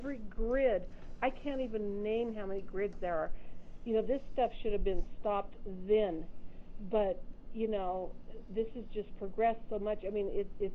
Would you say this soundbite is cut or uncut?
uncut